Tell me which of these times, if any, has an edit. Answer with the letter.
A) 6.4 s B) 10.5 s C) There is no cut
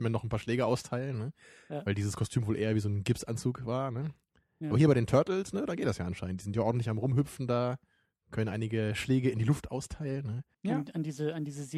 B